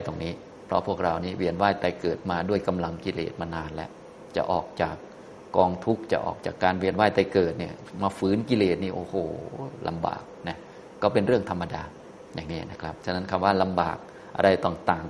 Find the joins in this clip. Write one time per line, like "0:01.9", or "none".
none